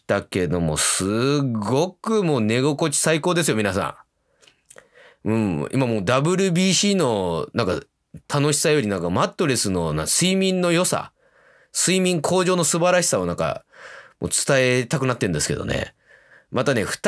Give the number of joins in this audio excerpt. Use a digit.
0